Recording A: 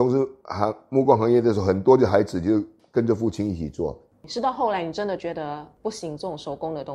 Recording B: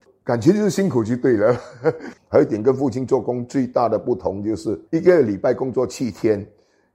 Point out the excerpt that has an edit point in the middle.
B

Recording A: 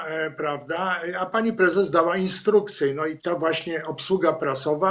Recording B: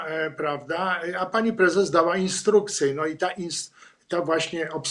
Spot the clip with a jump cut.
A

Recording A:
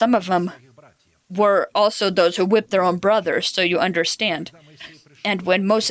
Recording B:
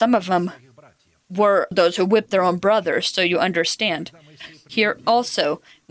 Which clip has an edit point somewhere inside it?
B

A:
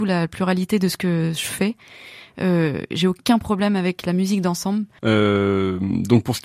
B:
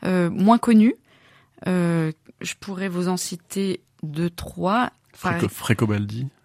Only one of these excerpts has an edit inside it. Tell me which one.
A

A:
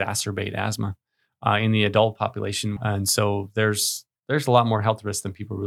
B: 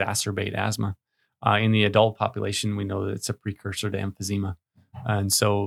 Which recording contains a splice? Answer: A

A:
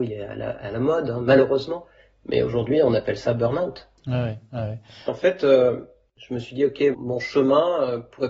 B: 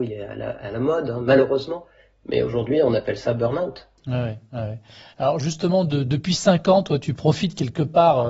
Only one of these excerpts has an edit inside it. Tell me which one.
A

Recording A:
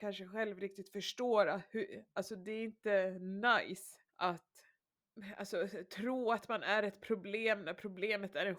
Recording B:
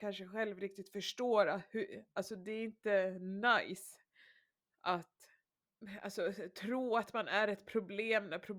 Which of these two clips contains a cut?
A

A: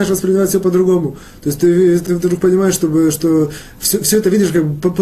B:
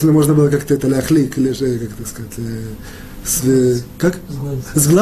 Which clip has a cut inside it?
A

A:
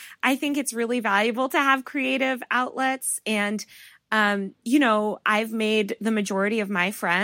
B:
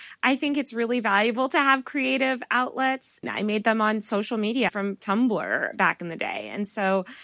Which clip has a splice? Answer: B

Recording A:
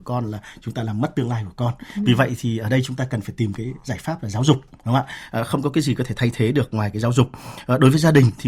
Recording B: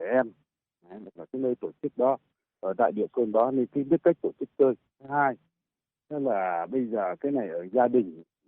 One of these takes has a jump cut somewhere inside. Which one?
B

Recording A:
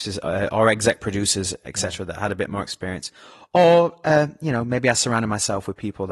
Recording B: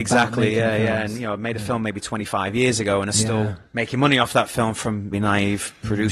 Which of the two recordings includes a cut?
B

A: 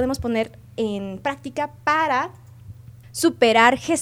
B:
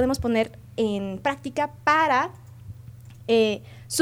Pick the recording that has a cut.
A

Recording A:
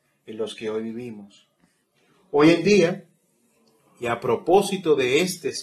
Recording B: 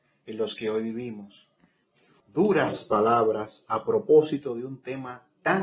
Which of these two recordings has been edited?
B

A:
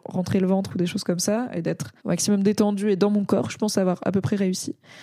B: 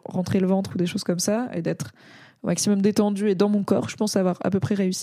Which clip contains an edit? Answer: A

